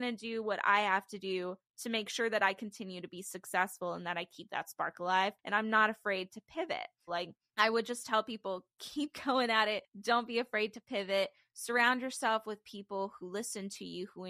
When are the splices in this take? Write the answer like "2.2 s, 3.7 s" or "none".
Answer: 7.1 s